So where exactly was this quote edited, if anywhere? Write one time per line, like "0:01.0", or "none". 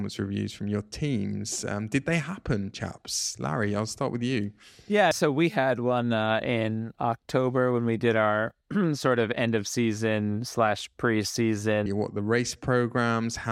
0:05.1
0:11.9